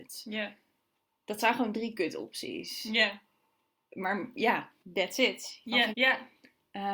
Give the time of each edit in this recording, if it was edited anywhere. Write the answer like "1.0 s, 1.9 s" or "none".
4.8 s, 5.9 s